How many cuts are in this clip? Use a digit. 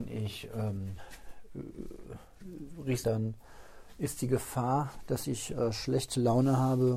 1